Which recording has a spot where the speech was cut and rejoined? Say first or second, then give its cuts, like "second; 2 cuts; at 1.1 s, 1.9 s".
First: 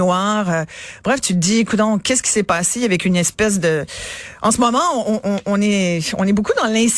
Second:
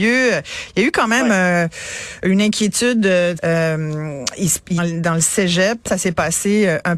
second; 3 cuts; at 3.4 s, 4.8 s, 5.9 s